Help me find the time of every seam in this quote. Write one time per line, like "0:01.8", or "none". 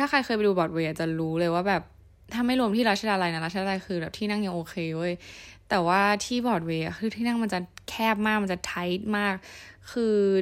none